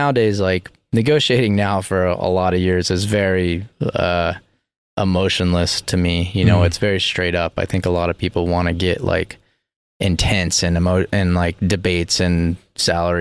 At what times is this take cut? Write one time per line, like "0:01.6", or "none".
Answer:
none